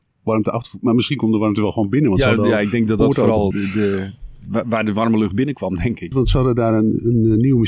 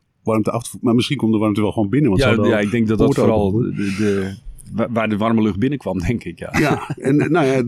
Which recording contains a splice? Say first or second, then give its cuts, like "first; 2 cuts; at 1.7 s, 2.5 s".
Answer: first; 2 cuts; at 3.5 s, 6.1 s